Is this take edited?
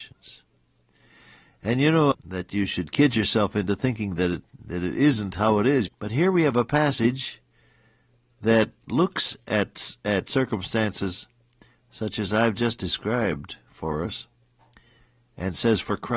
yes; 2 cuts; at 2.1 s, 5.9 s

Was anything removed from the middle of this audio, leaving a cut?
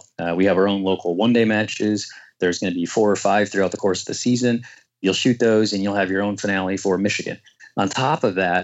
no; 0 cuts

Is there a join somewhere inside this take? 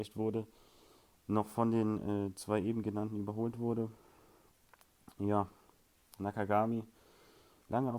no; 0 cuts

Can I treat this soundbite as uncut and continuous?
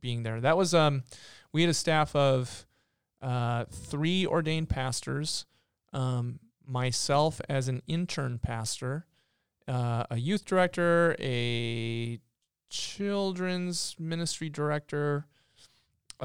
yes; 0 cuts

